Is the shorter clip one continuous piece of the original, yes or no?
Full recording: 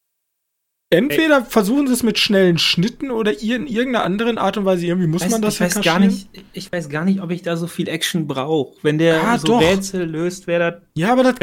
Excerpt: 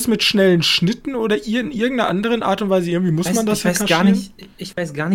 yes